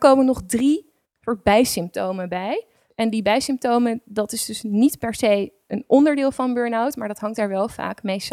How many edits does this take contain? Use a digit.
0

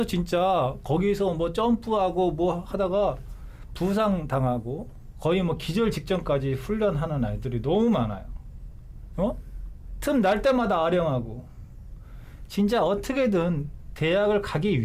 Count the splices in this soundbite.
2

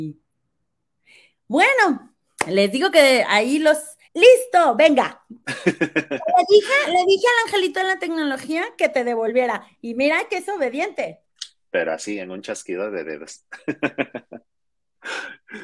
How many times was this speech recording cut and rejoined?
2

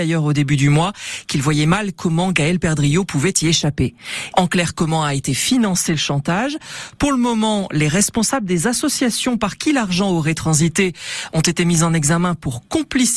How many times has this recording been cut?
1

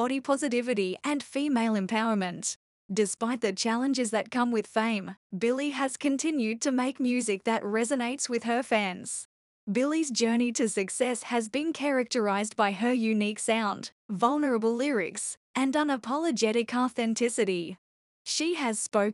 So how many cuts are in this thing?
2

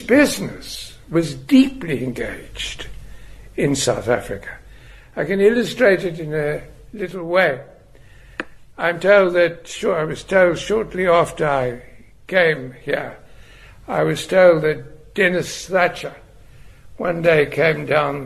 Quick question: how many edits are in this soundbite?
0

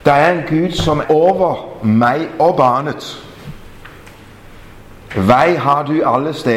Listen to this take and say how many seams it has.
2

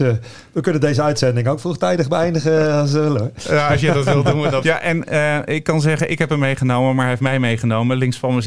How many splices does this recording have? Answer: 1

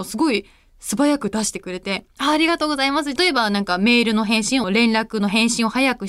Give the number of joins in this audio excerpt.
2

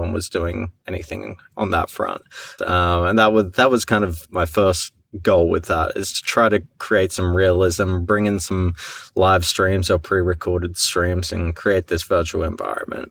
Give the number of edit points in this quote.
1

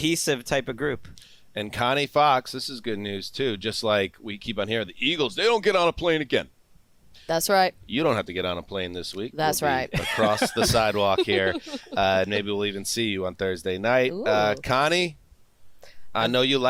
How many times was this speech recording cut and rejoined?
0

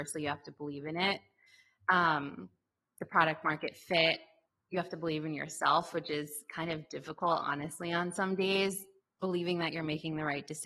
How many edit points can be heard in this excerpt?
0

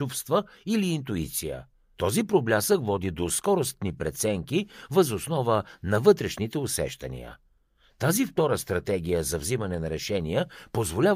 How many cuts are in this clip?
1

